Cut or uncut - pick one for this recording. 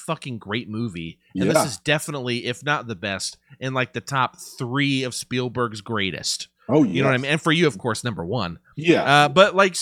uncut